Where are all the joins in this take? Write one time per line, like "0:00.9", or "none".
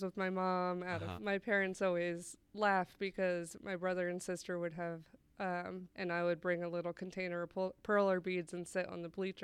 0:01.2
0:05.9